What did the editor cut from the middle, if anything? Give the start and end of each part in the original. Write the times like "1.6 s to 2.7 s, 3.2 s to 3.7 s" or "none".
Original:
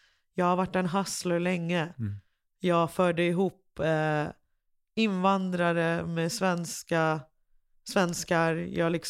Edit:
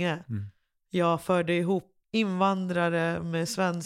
3.7 s to 4.9 s